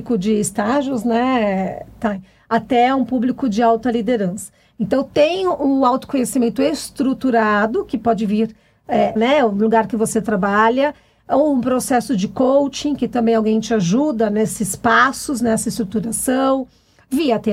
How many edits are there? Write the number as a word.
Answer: one